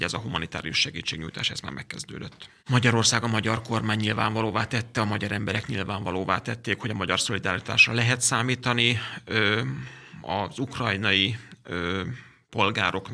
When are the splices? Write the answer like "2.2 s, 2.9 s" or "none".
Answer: 2.6 s

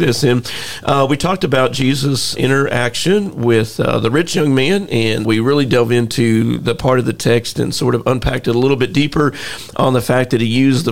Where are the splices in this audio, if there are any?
2.4 s, 5.2 s

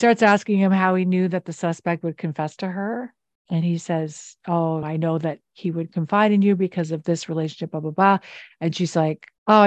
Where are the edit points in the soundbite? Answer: 4.8 s

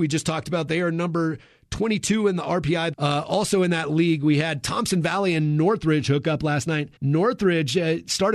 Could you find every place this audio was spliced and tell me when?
2.9 s, 7.0 s

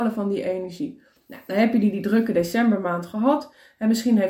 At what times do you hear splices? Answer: none

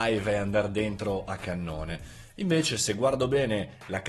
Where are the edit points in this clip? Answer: none

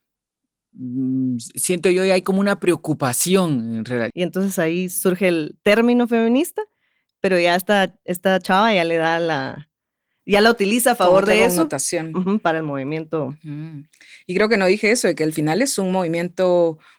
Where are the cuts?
4.1 s

